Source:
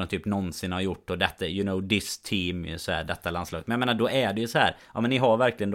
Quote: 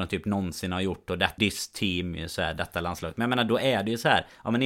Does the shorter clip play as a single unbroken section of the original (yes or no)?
no